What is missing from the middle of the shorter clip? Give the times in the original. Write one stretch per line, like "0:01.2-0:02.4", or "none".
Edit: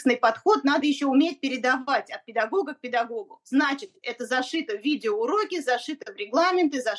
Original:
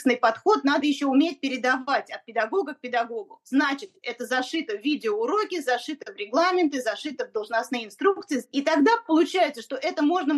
none